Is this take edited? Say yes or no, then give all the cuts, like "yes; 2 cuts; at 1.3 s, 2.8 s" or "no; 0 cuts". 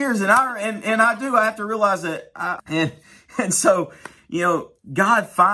yes; 1 cut; at 2.6 s